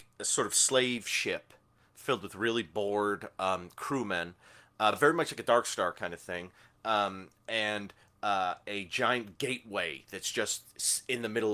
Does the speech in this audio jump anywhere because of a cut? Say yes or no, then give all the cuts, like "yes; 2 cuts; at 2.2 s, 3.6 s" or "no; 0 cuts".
no; 0 cuts